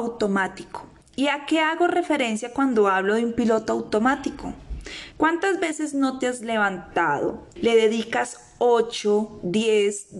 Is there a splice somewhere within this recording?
yes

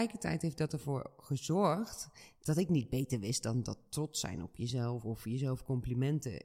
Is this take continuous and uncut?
yes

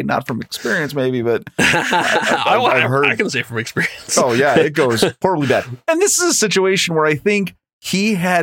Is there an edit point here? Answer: no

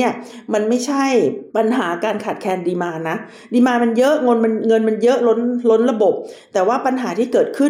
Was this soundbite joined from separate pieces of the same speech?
yes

